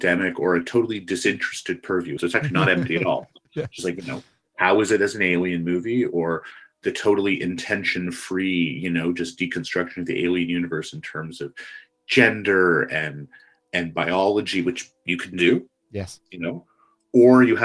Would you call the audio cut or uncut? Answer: cut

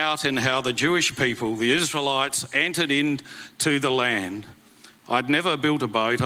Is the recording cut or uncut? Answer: cut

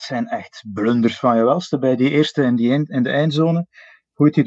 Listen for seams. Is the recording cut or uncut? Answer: uncut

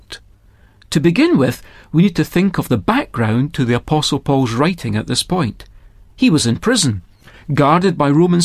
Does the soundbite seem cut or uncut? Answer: uncut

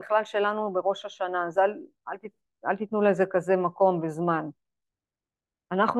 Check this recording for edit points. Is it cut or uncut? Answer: uncut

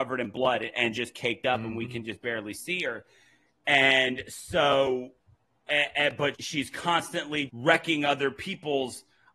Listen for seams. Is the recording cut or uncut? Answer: cut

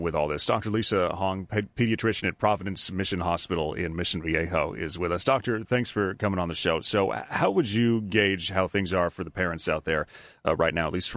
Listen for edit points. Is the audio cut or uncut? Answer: uncut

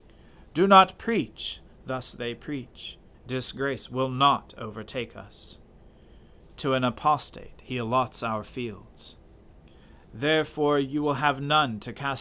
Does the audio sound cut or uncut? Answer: cut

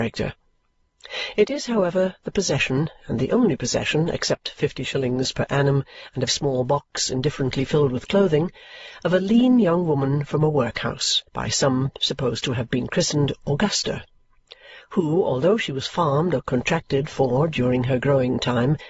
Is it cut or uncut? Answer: cut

